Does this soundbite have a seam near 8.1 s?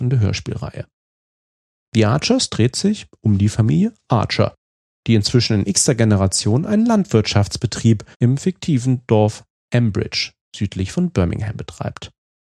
yes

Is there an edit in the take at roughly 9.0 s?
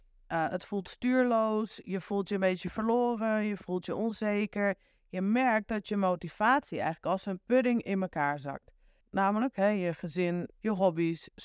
yes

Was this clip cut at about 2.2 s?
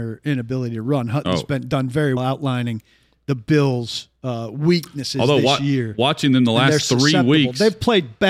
yes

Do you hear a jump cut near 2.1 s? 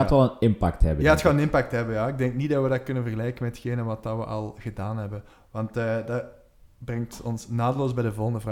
no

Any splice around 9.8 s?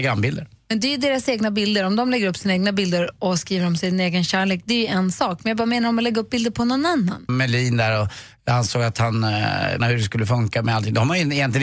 yes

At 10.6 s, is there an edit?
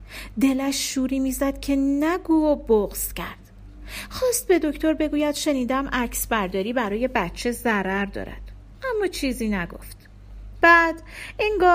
yes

